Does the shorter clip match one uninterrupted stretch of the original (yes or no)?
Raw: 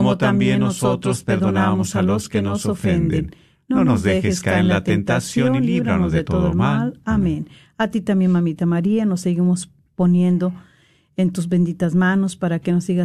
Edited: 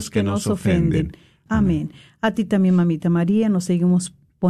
no